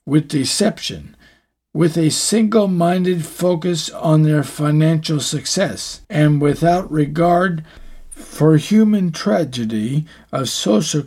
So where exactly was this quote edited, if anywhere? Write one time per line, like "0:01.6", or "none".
0:06.0